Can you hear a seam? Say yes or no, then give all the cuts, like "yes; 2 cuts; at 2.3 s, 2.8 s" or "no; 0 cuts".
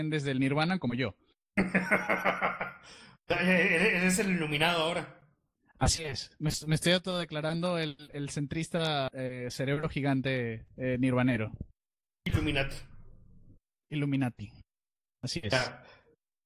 no; 0 cuts